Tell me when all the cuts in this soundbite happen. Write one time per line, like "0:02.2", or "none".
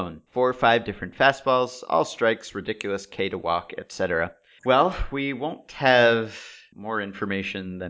0:04.6